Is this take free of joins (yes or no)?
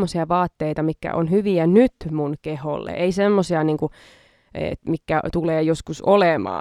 yes